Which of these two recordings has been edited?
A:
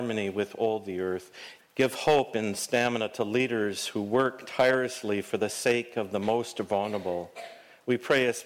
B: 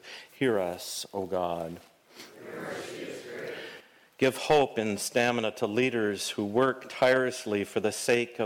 A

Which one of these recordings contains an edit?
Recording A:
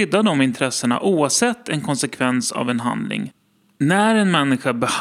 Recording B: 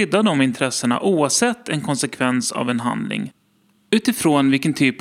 A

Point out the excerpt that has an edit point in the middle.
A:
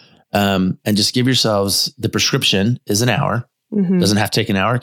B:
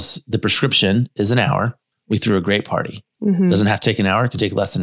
B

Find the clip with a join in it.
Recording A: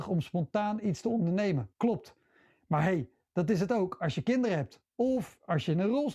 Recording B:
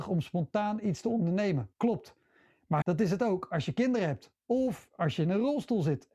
B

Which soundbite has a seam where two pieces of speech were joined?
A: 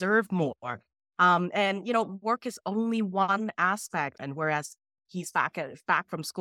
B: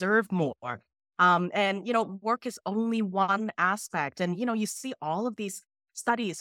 A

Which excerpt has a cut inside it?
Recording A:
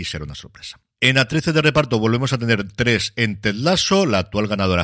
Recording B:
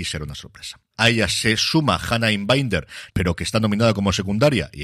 B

